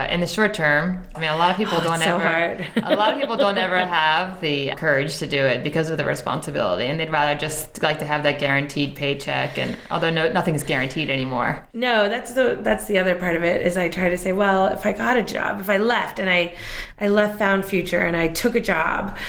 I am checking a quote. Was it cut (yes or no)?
yes